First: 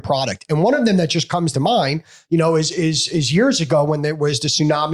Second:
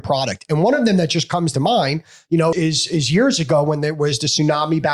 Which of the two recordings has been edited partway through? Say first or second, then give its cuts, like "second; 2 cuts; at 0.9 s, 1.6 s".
second; 1 cut; at 2.5 s